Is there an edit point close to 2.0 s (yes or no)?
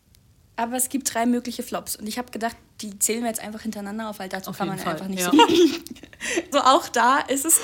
no